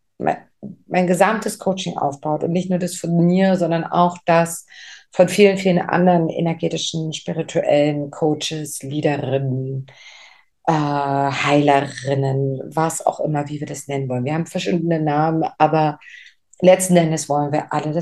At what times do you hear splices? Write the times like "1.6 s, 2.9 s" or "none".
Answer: none